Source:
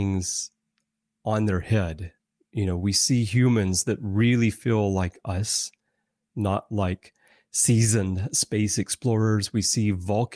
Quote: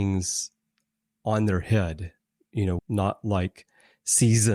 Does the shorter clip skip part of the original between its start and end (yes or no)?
yes